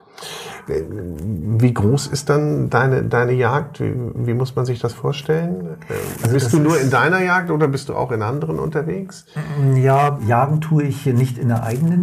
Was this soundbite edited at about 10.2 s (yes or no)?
yes